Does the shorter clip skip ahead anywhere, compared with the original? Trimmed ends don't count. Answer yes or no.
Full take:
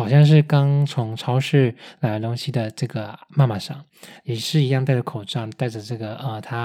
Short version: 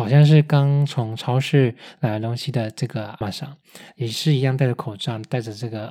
yes